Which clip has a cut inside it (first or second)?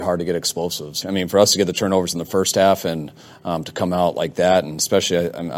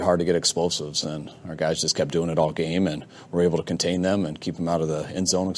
first